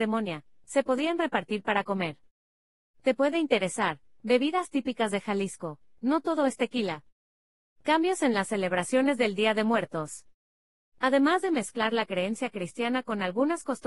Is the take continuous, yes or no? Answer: no